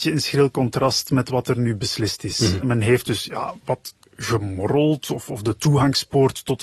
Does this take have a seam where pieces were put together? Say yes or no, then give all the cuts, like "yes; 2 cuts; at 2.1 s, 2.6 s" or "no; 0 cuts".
no; 0 cuts